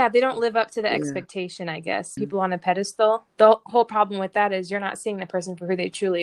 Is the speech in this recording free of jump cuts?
no; 1 cut; at 2.2 s

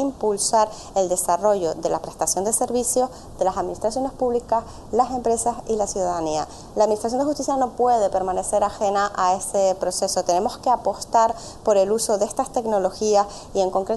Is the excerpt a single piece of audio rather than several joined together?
yes; 0 cuts

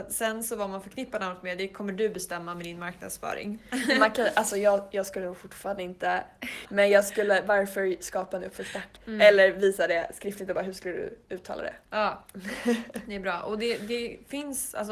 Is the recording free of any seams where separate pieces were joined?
no; 2 cuts; at 6.7 s, 9.0 s

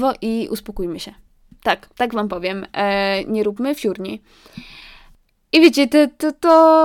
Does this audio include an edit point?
no; 0 cuts

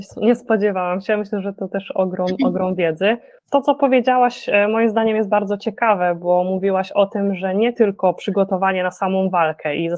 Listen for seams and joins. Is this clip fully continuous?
yes; 0 cuts

